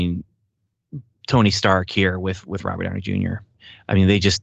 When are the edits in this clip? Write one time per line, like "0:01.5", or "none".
none